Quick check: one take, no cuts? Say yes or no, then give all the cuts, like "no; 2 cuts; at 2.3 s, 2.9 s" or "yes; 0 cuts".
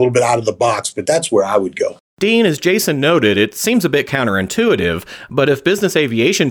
yes; 0 cuts